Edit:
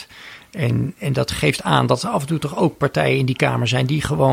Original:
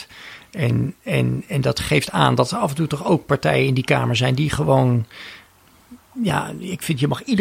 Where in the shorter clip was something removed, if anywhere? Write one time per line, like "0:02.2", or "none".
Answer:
0:01.0